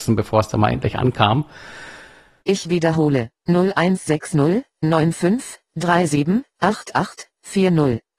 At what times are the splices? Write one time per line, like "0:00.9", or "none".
0:02.4